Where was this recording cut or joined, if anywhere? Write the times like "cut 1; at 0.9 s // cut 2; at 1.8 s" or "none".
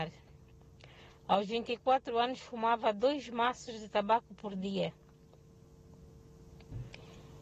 none